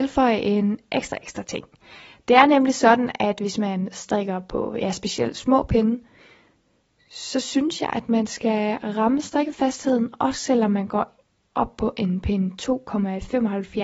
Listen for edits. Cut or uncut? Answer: uncut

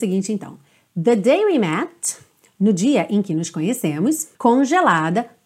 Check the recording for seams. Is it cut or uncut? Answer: cut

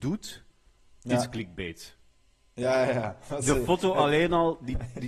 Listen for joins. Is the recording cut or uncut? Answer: uncut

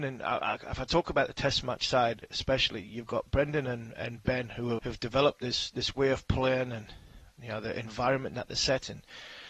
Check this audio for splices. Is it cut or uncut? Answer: cut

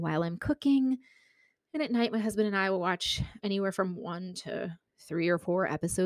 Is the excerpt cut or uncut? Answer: cut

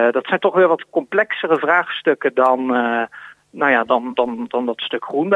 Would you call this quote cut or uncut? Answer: uncut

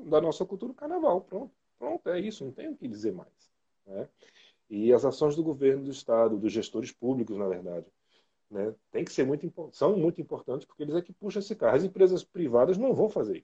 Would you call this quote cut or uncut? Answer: uncut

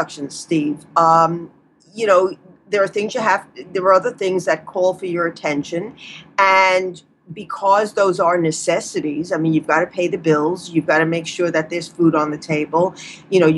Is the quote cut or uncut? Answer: uncut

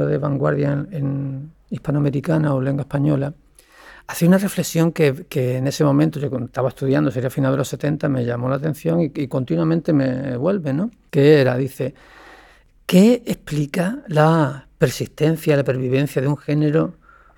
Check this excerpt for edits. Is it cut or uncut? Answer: uncut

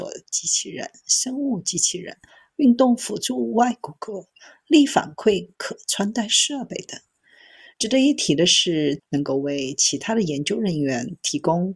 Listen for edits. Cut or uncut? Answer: cut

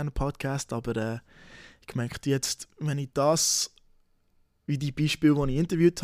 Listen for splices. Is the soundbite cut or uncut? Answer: uncut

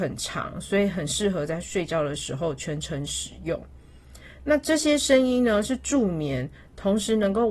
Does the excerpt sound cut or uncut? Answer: uncut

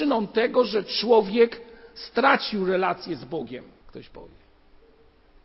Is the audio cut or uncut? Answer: cut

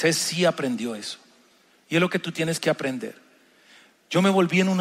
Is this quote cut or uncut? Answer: uncut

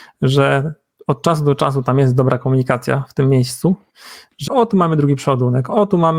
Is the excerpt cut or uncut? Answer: cut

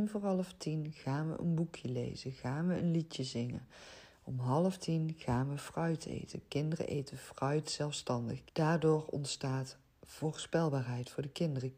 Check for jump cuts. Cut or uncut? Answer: cut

